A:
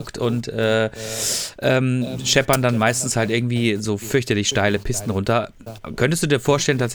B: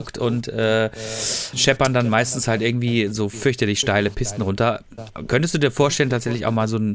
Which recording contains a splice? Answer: B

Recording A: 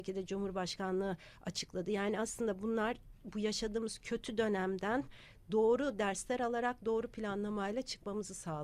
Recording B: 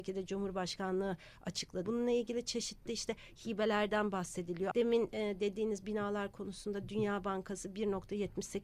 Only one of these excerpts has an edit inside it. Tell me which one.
B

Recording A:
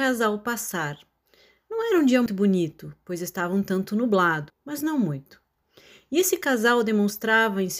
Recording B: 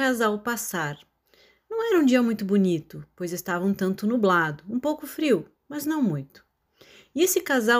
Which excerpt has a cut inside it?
A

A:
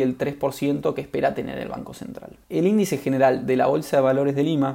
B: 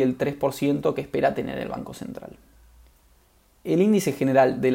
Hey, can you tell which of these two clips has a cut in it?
A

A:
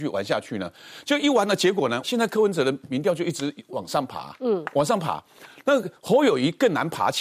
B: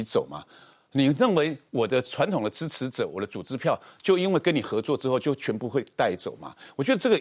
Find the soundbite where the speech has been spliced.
A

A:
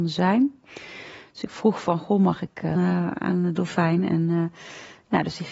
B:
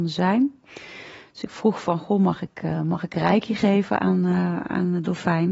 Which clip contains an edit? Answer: A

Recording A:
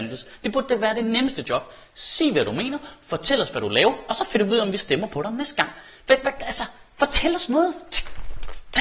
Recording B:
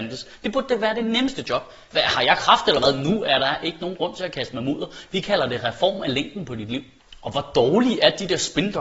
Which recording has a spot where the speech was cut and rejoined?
B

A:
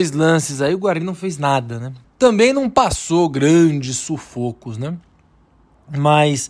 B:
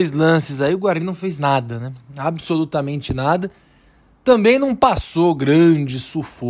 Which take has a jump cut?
A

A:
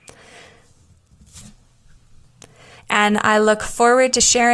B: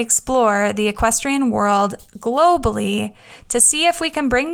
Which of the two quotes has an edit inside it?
A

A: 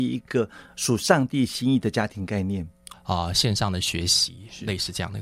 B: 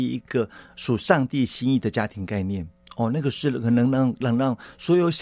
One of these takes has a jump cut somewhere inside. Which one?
A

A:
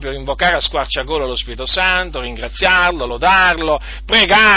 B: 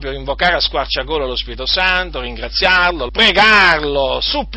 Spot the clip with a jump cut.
B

